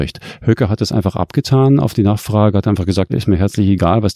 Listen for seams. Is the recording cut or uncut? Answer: cut